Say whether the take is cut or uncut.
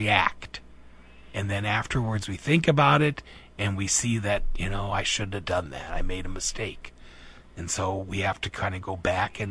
uncut